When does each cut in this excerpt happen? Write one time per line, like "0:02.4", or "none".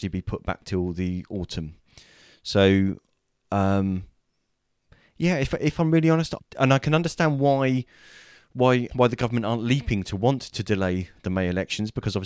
0:06.4
0:08.9